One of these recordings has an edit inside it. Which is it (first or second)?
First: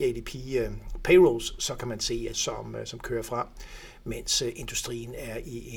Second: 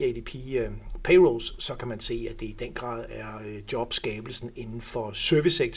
first